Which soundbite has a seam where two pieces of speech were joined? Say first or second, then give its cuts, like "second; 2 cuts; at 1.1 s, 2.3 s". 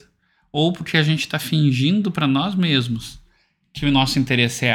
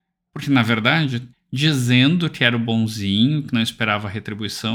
second; 1 cut; at 1.3 s